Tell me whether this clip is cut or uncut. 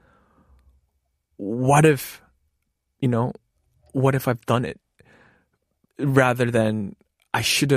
uncut